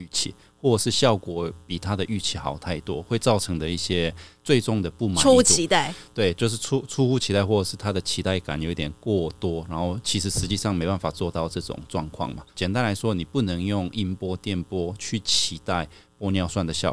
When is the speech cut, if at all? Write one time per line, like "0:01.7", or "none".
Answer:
0:12.5